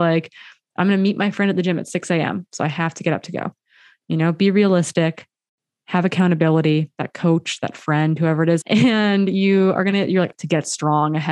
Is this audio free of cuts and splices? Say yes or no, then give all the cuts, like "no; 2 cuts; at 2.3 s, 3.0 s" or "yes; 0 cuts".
no; 2 cuts; at 8.6 s, 10.3 s